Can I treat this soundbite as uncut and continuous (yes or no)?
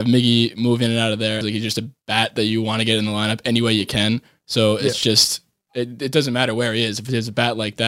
no